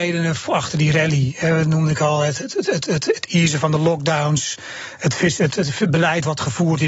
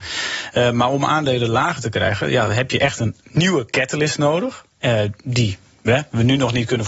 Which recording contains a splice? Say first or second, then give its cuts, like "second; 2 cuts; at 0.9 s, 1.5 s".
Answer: first; 1 cut; at 5.5 s